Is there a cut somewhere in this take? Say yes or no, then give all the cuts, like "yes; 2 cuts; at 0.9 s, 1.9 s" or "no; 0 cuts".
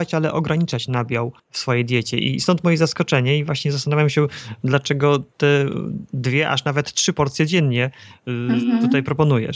yes; 1 cut; at 1.4 s